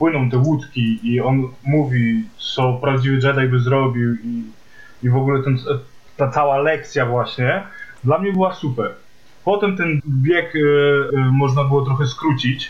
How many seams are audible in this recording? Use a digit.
2